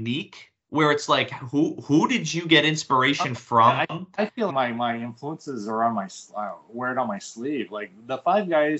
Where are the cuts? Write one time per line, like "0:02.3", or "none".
0:04.5